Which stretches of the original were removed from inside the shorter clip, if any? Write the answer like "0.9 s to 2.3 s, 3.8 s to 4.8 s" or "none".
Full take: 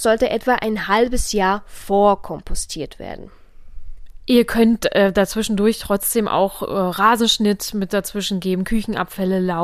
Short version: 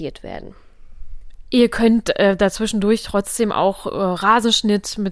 none

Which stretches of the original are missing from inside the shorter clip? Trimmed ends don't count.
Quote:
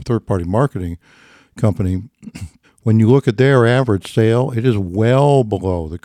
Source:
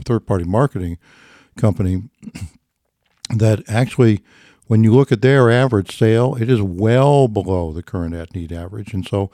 2.6 s to 4.5 s

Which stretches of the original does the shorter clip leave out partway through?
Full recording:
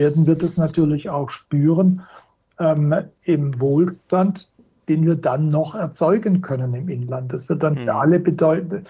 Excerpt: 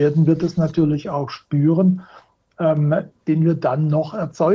3.1 s to 4.7 s

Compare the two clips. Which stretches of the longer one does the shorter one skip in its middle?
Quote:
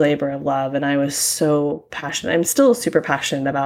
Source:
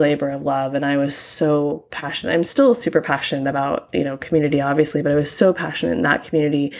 none

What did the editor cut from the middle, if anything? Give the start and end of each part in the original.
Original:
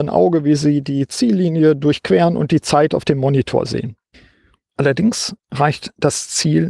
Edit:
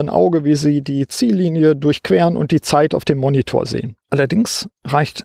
4.0 s to 4.7 s

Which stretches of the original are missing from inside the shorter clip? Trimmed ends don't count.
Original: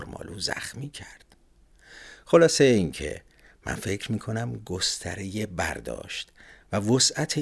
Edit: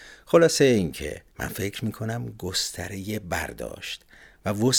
3.3 s to 3.6 s

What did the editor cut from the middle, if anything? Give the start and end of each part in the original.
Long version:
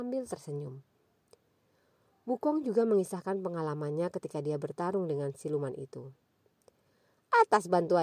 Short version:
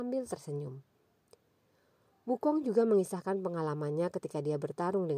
none

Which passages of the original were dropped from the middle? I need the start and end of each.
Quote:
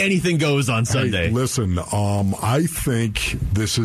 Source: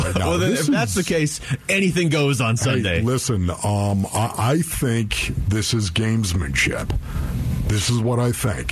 4.1 s to 4.3 s

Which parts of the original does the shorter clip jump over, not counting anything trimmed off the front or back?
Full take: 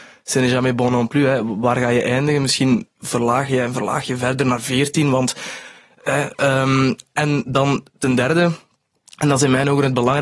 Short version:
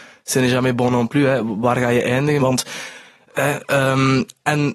2.4 s to 5.1 s

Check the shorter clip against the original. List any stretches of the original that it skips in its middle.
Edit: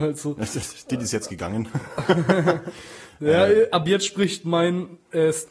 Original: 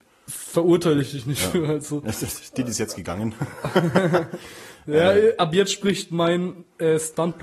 none

